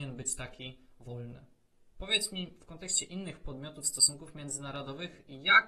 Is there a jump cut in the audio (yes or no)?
yes